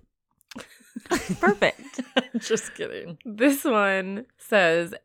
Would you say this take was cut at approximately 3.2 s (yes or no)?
no